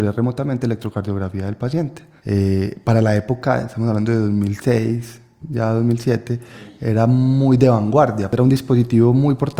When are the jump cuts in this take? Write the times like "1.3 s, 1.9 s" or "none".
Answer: 2.2 s